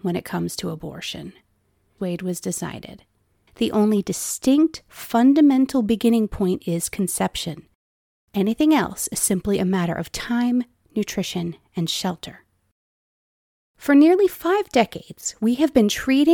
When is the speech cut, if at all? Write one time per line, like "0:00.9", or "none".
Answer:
0:02.0
0:03.5